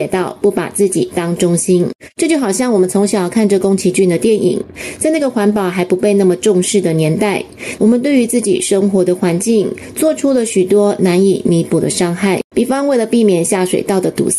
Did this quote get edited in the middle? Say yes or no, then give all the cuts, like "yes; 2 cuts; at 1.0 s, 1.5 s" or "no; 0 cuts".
yes; 2 cuts; at 7.8 s, 12.5 s